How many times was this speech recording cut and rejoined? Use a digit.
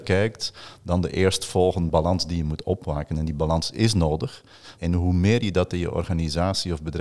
2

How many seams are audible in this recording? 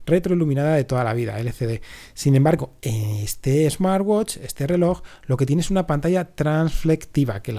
0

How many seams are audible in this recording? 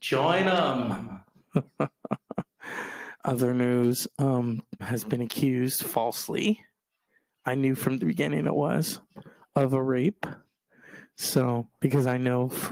1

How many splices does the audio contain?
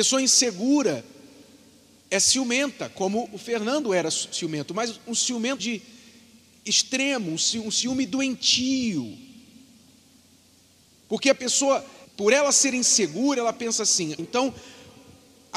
3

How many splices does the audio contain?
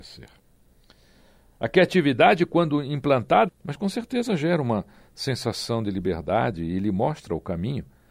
1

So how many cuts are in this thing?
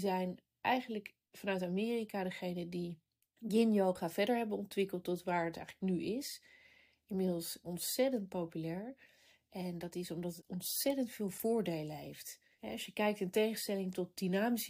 0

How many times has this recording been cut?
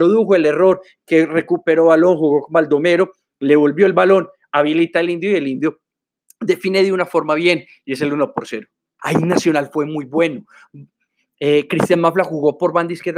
1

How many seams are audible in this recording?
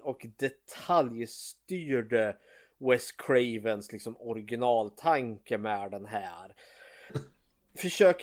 1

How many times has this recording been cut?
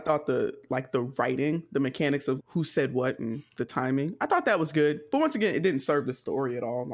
1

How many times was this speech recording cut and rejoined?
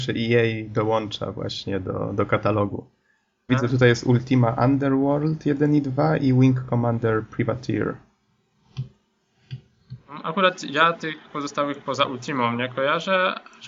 1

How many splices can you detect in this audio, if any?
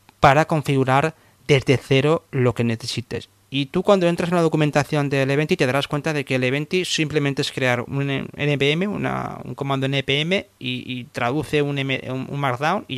1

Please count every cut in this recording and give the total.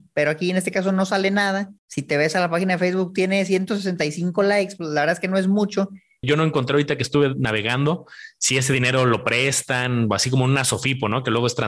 2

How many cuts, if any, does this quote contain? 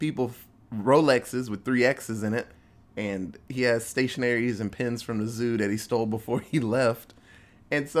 0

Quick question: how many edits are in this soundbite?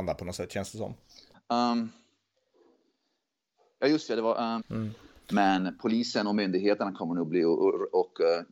2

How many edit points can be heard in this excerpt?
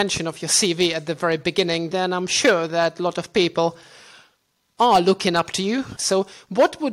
2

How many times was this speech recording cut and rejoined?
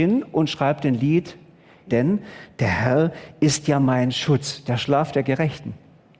1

